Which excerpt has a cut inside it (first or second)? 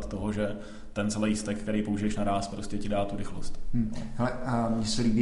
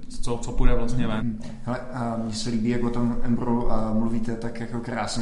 second